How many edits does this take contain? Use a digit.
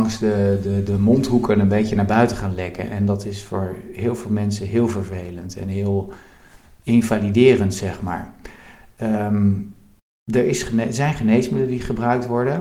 0